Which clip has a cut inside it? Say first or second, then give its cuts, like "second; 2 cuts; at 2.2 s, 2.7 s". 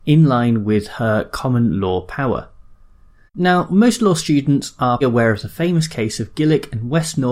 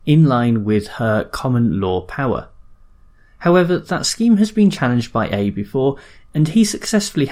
first; 2 cuts; at 3.3 s, 5.0 s